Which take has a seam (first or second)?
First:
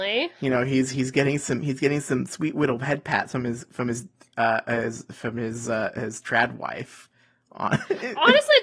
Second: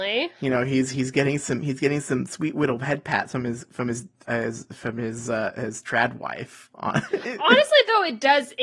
second